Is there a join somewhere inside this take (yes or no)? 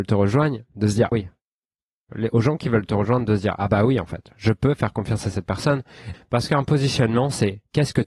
yes